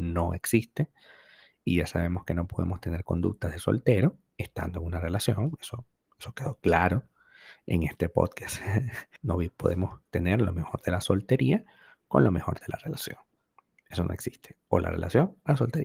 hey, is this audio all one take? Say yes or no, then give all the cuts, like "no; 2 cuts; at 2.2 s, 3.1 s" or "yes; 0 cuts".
no; 1 cut; at 9.2 s